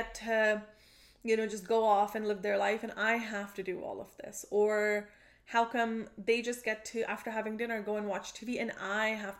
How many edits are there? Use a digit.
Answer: 0